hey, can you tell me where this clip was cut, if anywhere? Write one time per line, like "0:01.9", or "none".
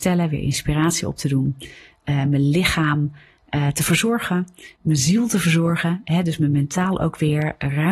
none